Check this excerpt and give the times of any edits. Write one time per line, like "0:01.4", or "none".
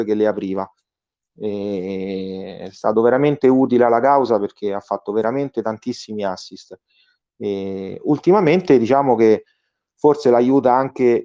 none